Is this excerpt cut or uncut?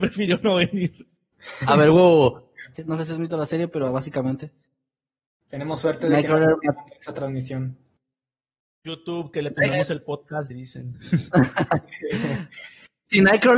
cut